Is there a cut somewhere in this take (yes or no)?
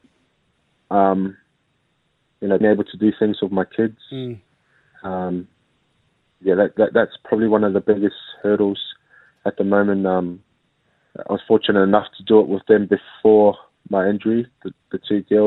yes